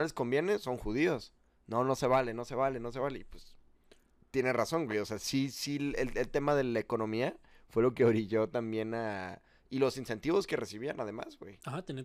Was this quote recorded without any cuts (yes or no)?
yes